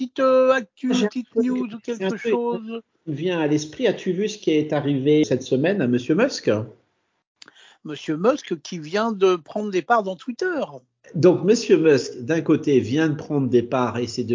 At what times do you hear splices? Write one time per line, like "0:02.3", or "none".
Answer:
0:05.2